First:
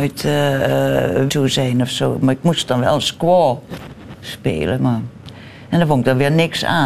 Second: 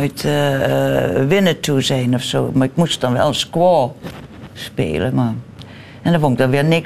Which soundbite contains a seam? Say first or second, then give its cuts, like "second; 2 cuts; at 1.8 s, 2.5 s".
first; 1 cut; at 1.3 s